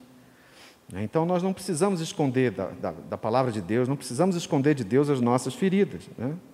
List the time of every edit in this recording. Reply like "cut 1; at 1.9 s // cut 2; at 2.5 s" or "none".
none